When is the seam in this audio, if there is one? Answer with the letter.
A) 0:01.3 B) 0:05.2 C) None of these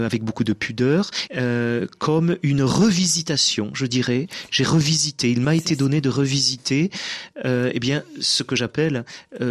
A